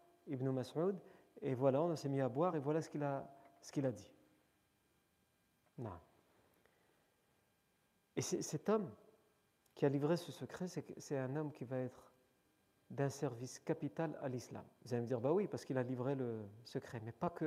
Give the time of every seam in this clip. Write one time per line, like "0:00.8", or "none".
none